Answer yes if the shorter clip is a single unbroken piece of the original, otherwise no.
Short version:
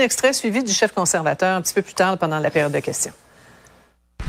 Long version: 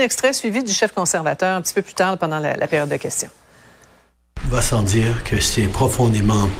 no